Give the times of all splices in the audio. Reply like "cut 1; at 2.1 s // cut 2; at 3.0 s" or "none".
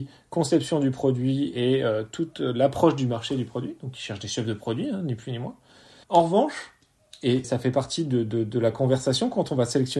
cut 1; at 6.0 s // cut 2; at 7.4 s